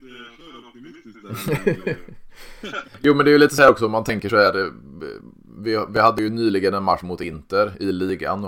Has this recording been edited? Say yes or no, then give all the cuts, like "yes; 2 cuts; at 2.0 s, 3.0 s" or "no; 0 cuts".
no; 0 cuts